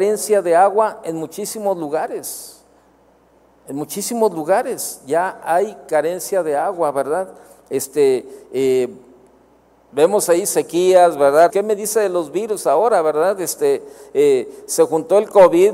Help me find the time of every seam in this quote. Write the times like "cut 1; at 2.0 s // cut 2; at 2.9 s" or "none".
cut 1; at 11.5 s